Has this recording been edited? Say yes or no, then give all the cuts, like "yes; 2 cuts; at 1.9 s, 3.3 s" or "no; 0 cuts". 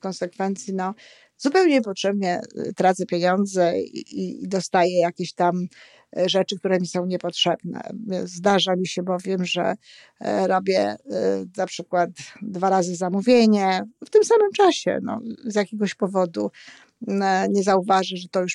no; 0 cuts